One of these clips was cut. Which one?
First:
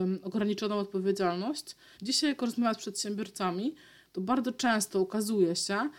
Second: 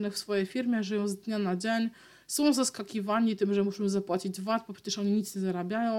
first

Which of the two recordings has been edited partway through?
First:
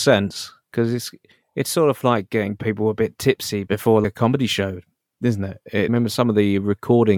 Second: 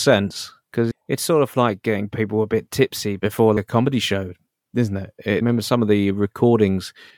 second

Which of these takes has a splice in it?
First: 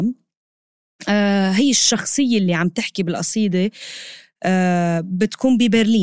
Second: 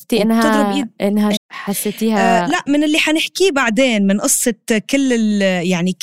second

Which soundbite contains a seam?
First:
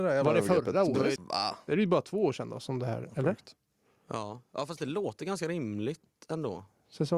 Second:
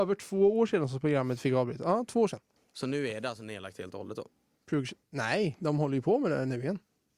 first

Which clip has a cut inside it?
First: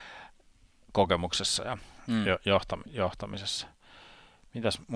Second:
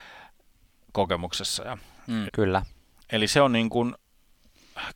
second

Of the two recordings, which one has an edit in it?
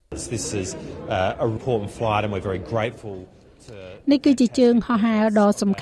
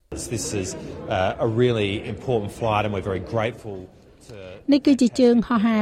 first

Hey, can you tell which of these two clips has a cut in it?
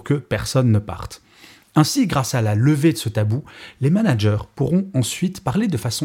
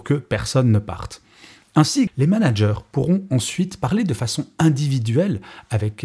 second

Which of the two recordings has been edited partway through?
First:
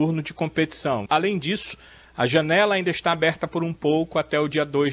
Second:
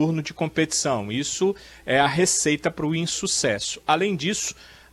first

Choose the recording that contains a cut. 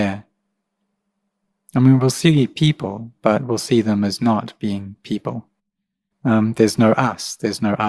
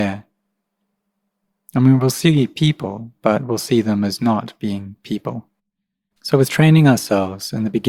second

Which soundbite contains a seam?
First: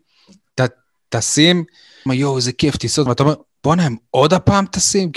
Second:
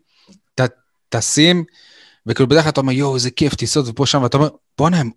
first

